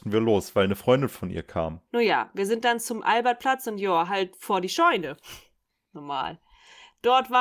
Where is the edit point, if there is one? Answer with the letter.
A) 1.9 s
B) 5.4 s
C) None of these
A